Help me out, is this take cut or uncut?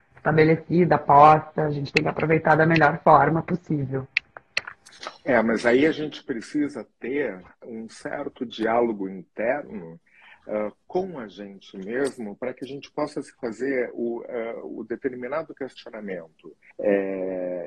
cut